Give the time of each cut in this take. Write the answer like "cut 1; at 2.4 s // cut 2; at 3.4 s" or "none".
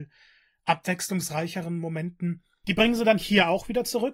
cut 1; at 2.6 s